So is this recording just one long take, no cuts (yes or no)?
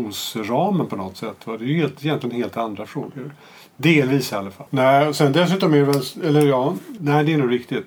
no